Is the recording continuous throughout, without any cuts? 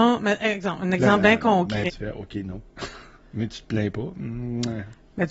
no; 1 cut; at 1.9 s

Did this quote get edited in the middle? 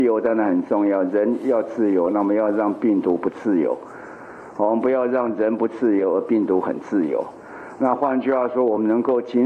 no; 0 cuts

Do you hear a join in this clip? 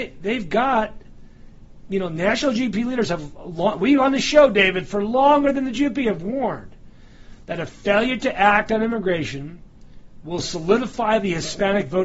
no; 0 cuts

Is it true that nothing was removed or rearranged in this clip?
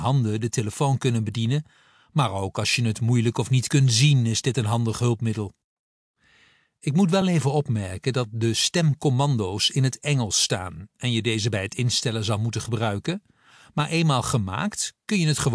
yes; 0 cuts

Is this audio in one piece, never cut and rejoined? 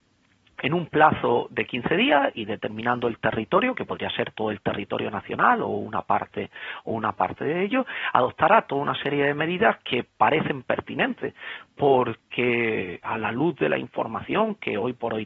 no; 1 cut; at 13.0 s

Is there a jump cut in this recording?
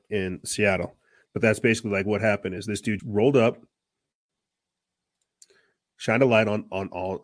yes; 2 cuts; at 1.3 s, 3.0 s

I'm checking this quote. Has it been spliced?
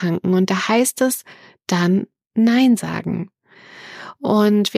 no; 0 cuts

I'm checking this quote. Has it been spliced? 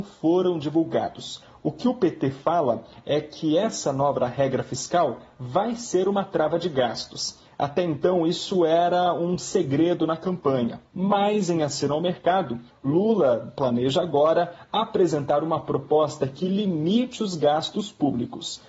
no; 0 cuts

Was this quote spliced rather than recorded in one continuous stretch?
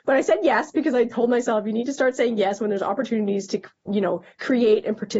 no; 0 cuts

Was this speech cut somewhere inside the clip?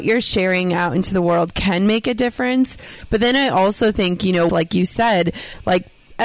yes; 1 cut; at 4.5 s

